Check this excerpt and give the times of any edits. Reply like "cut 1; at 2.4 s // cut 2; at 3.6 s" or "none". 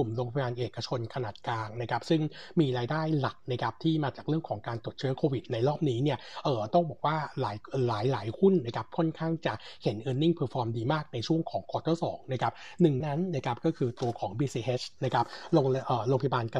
cut 1; at 13.0 s